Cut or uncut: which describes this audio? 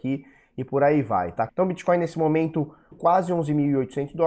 cut